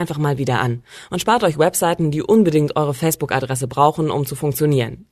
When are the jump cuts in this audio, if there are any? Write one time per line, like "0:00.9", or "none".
none